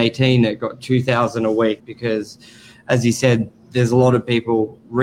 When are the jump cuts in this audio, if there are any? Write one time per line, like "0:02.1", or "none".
0:01.8